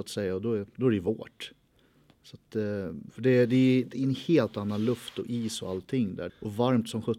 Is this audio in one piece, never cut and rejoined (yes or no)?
no